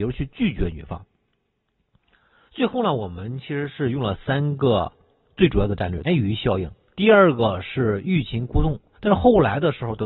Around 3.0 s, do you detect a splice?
no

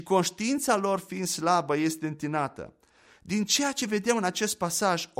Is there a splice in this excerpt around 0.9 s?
no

